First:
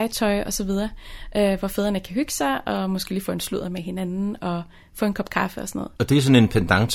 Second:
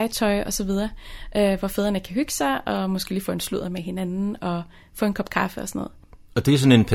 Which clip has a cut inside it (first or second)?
first